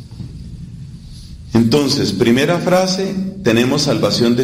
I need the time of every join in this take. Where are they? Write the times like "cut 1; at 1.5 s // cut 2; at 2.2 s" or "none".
none